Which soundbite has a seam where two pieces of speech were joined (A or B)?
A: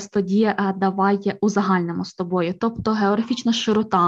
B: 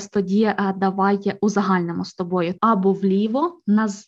B